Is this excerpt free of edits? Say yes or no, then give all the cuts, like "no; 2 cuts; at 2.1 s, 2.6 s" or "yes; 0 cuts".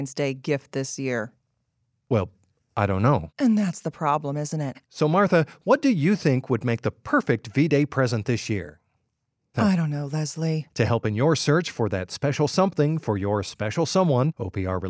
no; 3 cuts; at 4.8 s, 9.5 s, 10.7 s